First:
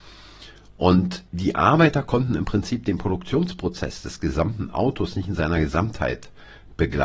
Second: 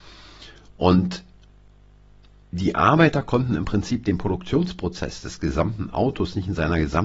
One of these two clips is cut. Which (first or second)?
first